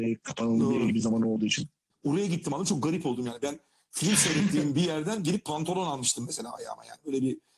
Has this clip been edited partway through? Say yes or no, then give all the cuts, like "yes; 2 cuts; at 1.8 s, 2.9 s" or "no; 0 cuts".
yes; 1 cut; at 1.9 s